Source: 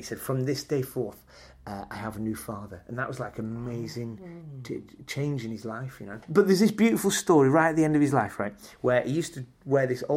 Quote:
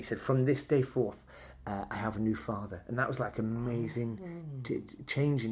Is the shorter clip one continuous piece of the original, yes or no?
yes